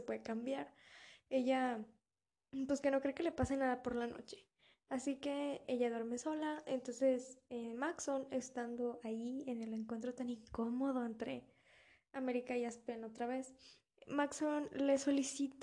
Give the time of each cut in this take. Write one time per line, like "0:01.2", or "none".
0:05.6